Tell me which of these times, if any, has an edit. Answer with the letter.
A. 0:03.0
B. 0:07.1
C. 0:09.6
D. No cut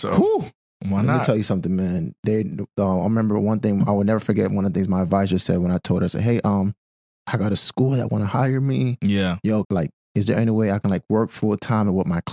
C